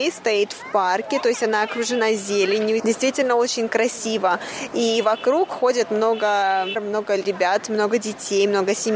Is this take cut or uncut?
cut